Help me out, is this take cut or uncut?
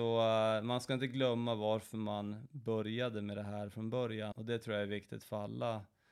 cut